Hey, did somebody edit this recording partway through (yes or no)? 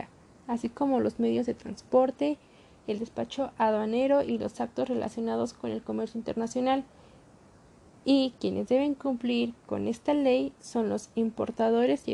no